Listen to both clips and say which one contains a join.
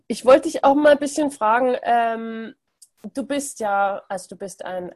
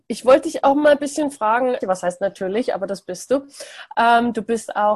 second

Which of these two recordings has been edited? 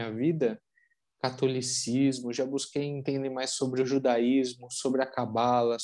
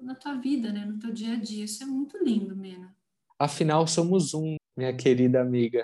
second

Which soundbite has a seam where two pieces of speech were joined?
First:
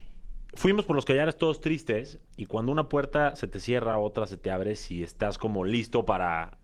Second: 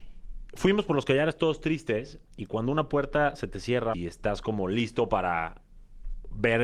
second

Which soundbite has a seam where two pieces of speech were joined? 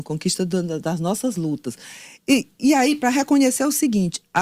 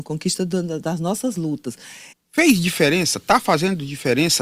second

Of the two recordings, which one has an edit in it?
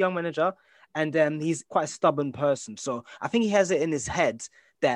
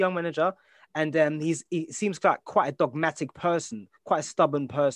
first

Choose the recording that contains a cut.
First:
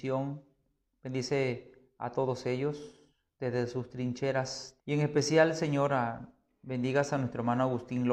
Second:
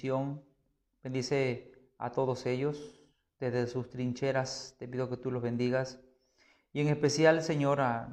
first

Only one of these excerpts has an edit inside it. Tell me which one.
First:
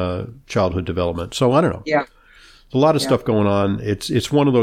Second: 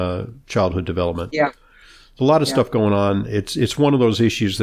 second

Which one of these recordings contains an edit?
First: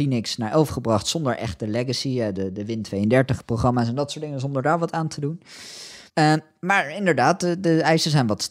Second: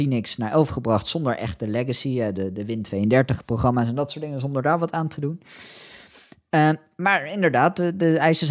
first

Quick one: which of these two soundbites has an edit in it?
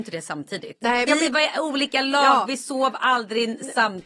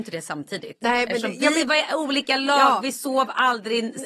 first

